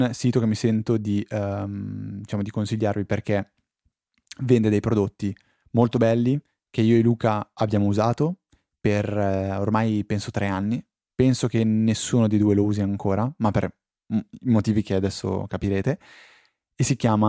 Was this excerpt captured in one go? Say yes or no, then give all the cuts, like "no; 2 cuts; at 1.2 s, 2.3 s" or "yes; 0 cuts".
yes; 0 cuts